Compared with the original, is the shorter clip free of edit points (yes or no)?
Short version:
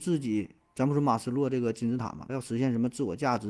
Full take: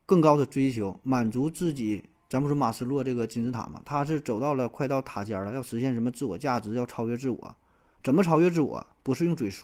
no